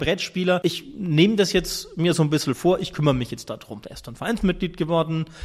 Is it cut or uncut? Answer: uncut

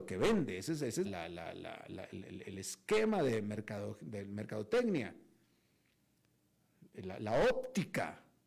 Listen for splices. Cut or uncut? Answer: cut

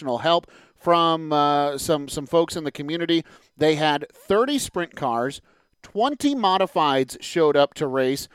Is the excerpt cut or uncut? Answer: uncut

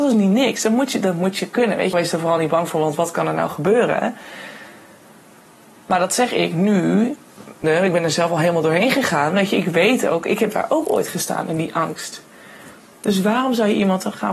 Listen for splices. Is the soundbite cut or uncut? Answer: cut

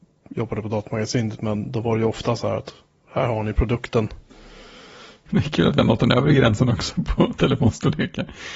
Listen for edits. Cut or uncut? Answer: cut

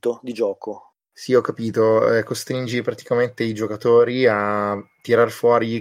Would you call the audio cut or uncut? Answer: uncut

